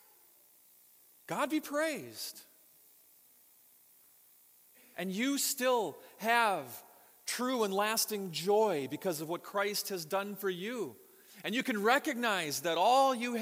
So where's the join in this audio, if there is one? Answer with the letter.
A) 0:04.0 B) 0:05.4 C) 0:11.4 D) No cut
D